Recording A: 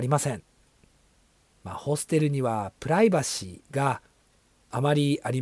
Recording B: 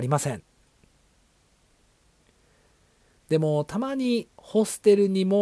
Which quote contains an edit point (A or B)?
A